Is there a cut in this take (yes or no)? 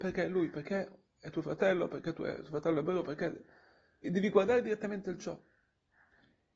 yes